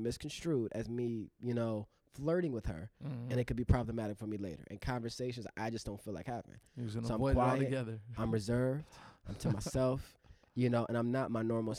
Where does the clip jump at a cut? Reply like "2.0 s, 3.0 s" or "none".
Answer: none